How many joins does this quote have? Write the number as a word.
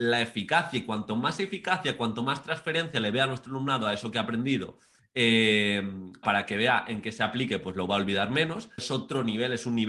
two